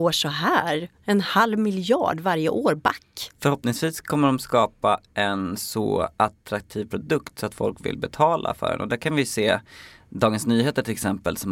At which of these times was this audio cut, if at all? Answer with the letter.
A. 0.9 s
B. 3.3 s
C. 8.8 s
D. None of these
B